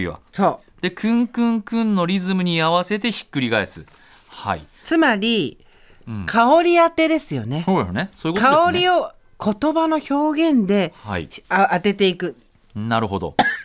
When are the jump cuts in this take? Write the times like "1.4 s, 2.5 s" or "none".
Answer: 11.4 s